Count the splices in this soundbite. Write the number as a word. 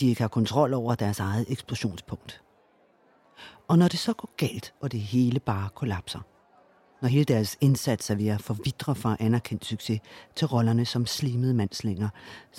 zero